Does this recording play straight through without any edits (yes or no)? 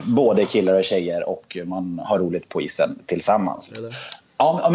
no